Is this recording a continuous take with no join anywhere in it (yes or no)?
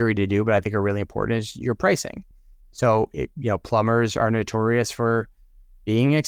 yes